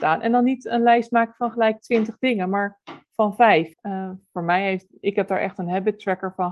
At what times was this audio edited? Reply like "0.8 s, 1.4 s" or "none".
3.7 s